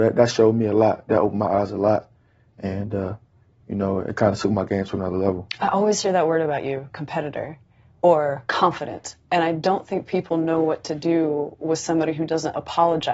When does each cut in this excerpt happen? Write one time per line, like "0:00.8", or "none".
none